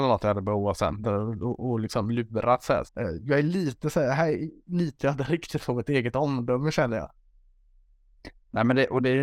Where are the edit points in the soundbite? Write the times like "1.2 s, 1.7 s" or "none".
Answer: 2.9 s